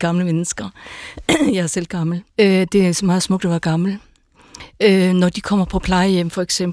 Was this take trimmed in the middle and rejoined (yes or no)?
yes